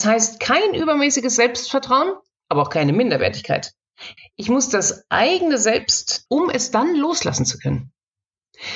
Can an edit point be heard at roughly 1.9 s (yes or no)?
no